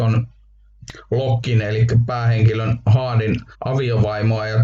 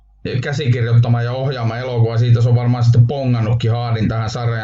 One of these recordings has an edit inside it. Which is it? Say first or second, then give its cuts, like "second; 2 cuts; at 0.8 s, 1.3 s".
first; 1 cut; at 3.5 s